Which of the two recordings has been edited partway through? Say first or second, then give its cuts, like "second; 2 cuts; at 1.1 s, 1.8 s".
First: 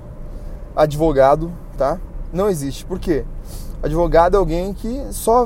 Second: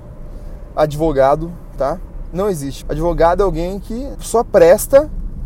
second; 2 cuts; at 2.8 s, 4.1 s